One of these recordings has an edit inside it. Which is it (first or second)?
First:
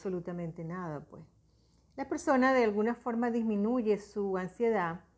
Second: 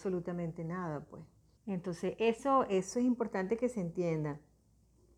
second